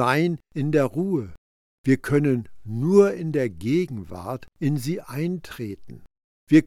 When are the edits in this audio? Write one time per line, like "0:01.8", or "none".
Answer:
0:01.7